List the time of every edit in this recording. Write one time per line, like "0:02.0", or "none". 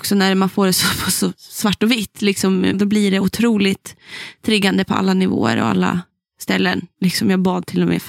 0:02.7